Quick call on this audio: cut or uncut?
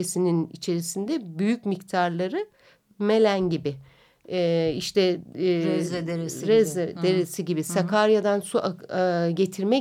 uncut